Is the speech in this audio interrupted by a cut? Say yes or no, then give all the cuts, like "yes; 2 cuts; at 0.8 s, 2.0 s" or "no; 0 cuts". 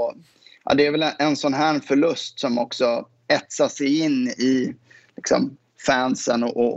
no; 0 cuts